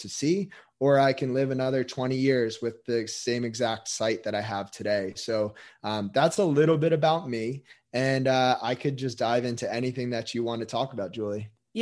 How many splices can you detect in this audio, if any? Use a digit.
0